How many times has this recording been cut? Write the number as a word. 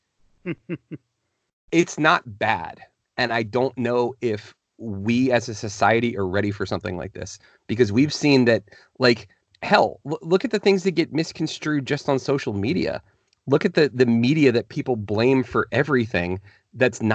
one